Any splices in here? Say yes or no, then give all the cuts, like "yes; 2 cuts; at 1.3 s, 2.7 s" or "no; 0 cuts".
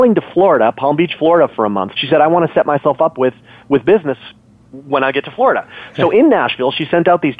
yes; 1 cut; at 1.9 s